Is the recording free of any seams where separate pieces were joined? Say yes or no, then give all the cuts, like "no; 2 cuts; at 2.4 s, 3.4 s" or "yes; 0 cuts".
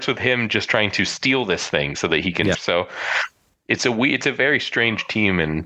no; 1 cut; at 2.5 s